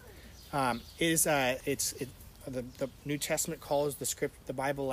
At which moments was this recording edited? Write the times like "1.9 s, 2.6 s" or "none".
1.6 s